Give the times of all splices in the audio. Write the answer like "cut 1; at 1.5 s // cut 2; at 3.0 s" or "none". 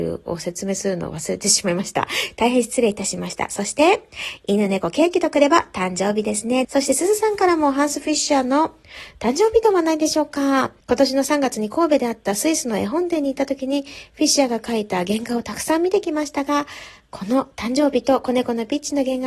cut 1; at 6.6 s // cut 2; at 10.8 s